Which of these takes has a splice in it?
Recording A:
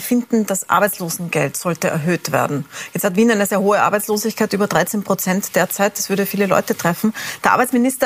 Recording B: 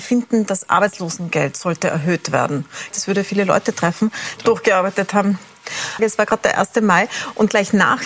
B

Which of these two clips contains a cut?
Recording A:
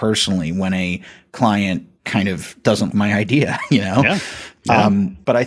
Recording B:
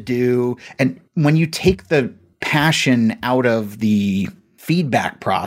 A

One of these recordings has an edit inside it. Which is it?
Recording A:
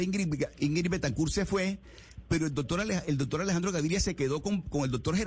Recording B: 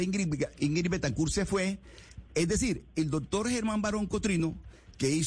B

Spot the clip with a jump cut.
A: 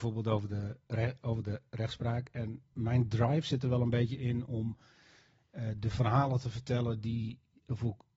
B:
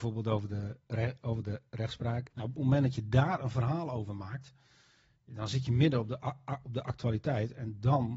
B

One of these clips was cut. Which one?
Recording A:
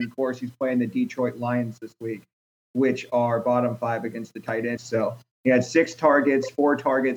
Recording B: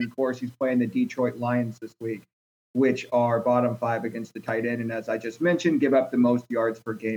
A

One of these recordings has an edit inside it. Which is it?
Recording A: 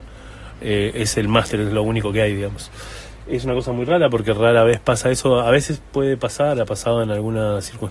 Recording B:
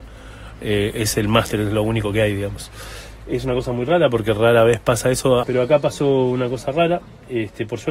B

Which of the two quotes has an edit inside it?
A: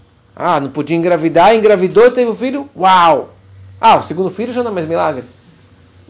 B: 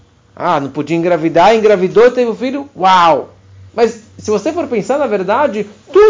B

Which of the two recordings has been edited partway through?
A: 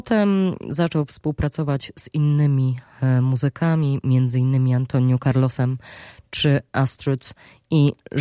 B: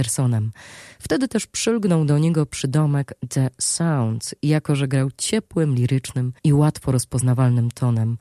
B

